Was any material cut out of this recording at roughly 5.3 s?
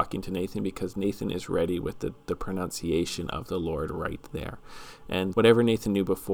yes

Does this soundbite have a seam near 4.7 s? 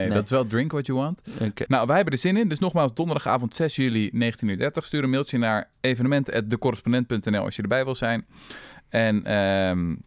no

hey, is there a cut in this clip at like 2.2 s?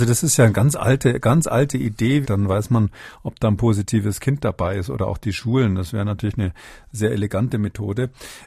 yes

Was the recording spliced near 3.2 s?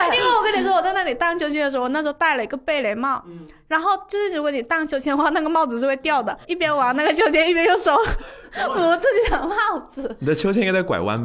no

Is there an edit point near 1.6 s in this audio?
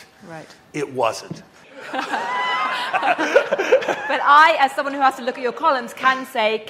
yes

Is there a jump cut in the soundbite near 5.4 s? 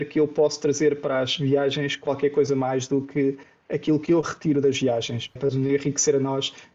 yes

